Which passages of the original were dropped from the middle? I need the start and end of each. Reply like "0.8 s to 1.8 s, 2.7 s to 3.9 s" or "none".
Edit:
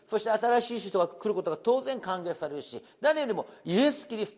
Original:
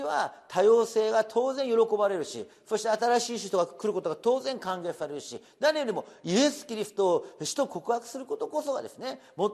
none